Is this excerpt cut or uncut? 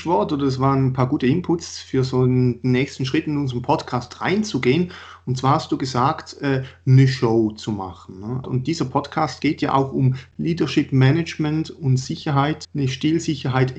cut